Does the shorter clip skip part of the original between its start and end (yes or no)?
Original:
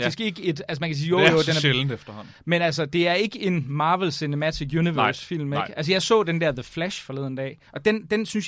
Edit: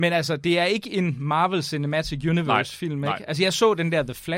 no